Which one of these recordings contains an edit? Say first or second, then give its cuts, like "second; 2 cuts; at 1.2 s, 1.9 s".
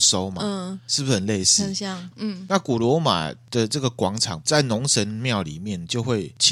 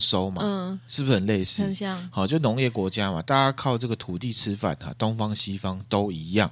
first; 1 cut; at 2.1 s